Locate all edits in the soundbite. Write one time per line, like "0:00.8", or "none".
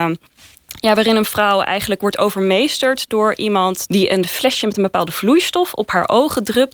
0:03.9